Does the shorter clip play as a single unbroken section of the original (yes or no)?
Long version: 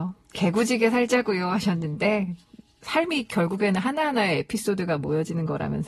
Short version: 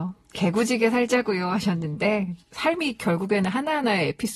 no